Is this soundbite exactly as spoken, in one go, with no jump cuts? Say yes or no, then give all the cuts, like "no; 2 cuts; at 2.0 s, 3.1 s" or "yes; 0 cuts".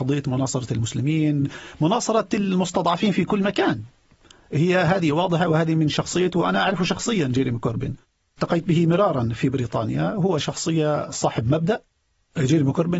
yes; 0 cuts